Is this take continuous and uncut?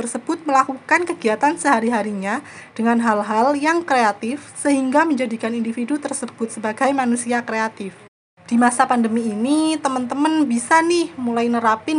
yes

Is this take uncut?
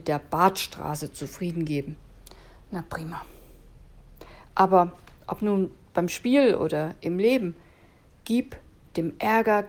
yes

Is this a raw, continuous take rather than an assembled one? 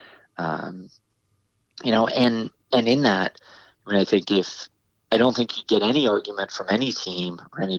yes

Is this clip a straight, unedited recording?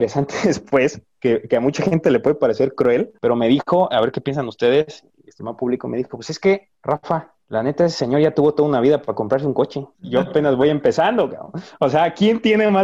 yes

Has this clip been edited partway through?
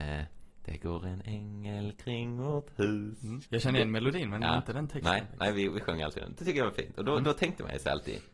yes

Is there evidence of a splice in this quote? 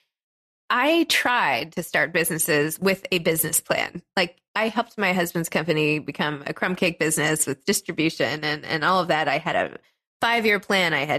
no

